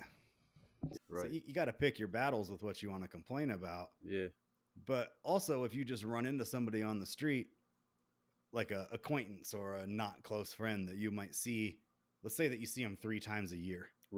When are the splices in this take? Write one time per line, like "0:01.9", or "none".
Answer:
0:01.0